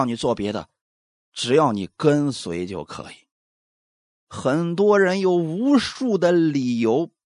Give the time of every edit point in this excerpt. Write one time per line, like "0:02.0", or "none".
0:04.1